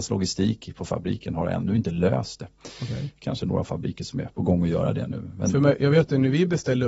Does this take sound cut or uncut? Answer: uncut